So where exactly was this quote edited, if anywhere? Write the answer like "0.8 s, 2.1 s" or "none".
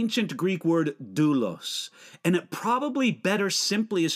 none

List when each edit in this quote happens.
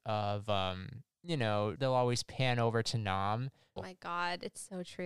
1.8 s, 3.8 s

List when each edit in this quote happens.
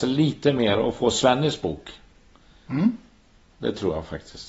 none

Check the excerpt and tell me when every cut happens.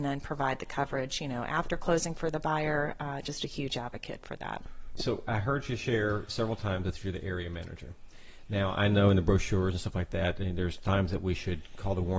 5.0 s

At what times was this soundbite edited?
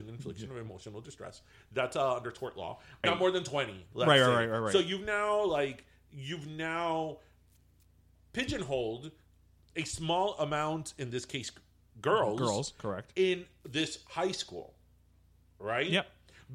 3.0 s

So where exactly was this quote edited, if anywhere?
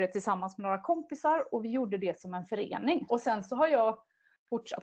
3.1 s

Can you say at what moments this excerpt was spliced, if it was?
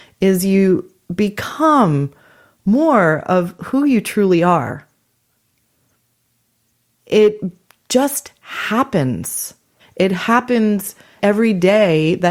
9.8 s, 11.2 s

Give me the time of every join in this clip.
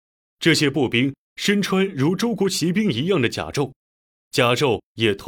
none

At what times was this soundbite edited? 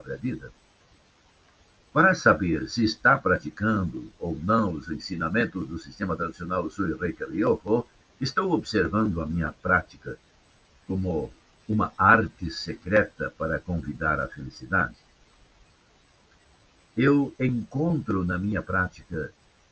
1.8 s, 8.0 s

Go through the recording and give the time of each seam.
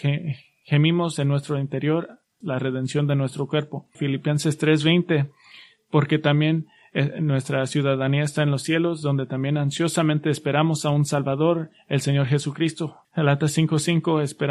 2.4 s, 3.9 s, 13.0 s

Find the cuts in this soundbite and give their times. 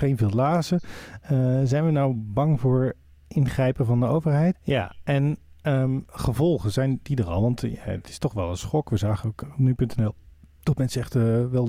4.5 s, 9.4 s

